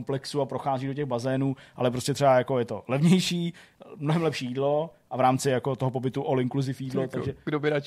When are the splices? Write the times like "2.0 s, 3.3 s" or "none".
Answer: none